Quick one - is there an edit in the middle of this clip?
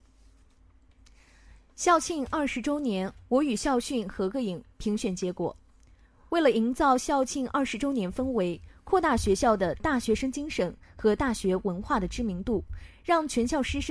no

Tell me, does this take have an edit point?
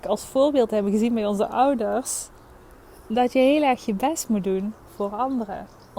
no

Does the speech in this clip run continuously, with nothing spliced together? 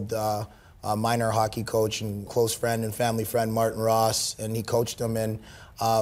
no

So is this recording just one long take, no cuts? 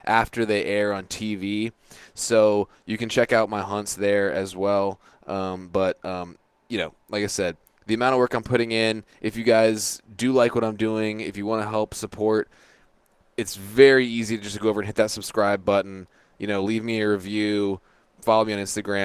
yes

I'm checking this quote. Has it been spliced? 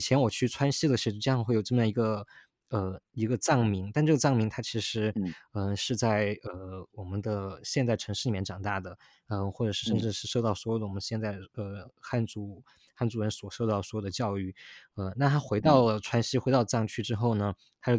no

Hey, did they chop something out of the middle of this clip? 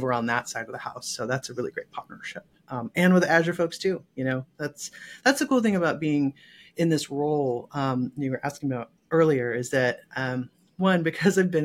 no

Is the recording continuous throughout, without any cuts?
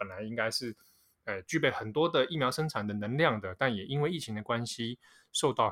yes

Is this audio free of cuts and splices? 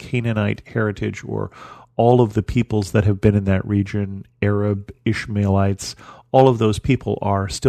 yes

